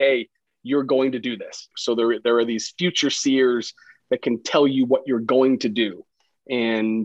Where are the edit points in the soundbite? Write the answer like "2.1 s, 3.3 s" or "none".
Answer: 1.7 s